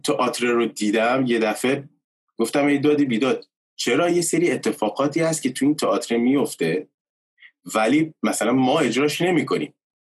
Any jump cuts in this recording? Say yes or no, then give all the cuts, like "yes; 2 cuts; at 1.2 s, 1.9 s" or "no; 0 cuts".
no; 0 cuts